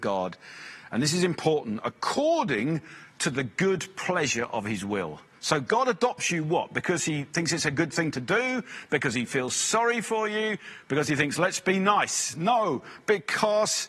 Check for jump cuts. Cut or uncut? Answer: uncut